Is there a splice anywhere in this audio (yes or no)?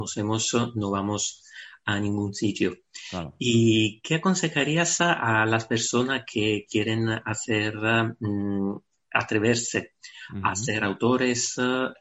no